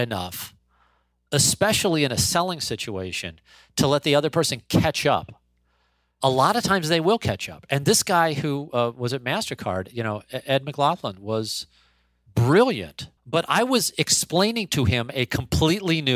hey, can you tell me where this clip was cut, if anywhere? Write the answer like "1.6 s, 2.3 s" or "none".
13.2 s